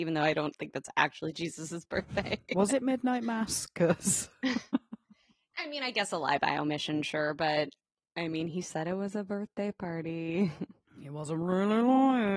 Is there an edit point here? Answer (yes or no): no